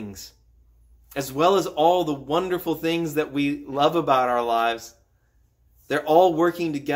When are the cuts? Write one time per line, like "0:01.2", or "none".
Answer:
none